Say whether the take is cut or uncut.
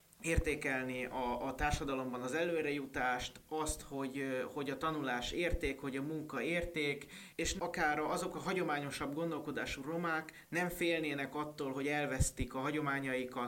uncut